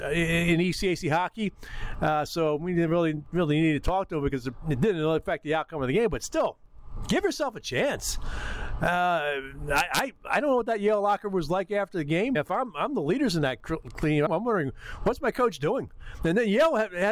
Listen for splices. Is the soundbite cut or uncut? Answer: cut